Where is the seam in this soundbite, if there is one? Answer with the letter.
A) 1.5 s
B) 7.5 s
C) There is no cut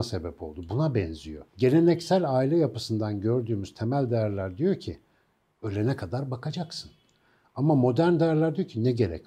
A